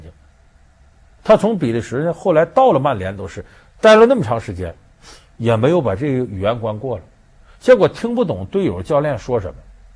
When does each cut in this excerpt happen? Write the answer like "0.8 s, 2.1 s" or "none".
none